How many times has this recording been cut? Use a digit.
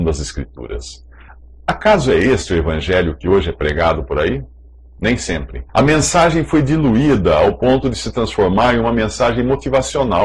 1